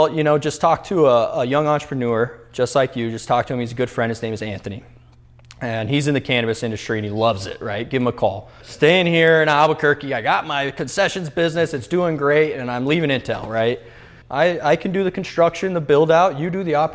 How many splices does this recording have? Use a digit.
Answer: 2